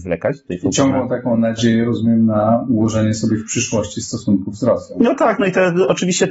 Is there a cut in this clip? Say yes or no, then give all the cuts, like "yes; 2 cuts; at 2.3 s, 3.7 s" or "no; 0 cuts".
no; 0 cuts